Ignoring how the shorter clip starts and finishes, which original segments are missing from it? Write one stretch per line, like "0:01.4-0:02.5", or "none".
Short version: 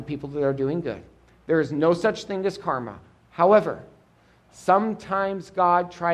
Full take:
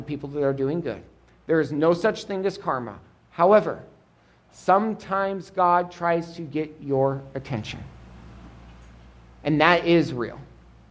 none